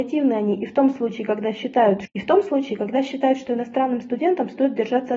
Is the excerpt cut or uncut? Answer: cut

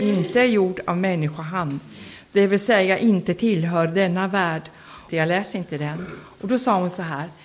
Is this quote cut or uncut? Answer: cut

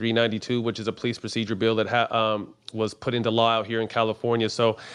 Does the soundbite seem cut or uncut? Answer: uncut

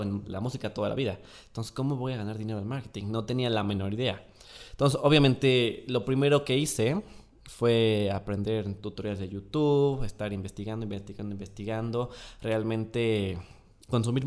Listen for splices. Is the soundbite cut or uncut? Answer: uncut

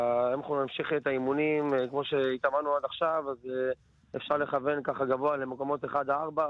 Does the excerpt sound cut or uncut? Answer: uncut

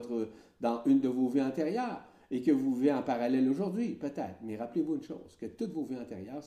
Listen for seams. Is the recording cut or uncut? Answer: uncut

